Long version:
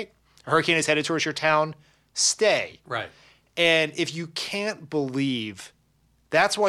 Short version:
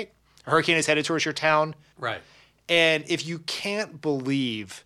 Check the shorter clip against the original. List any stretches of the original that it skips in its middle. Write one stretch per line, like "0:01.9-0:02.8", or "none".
0:01.9-0:02.8